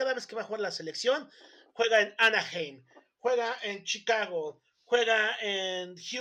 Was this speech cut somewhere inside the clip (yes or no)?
no